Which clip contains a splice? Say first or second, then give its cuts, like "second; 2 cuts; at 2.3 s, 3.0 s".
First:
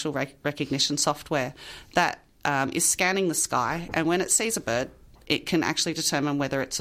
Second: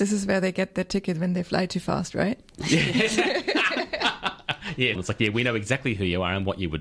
second; 1 cut; at 4.9 s